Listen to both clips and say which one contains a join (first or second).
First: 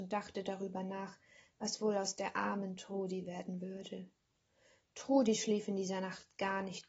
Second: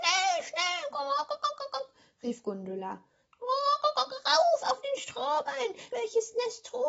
second